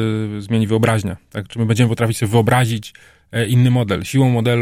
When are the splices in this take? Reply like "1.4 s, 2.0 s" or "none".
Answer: none